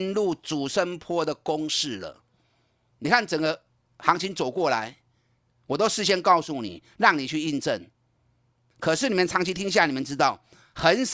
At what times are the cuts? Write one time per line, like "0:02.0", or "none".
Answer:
0:02.9
0:08.7